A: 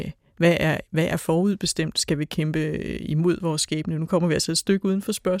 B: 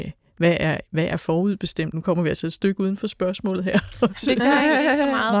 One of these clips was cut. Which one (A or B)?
B